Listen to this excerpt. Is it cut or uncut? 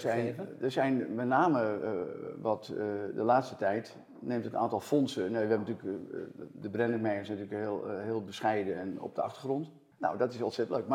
cut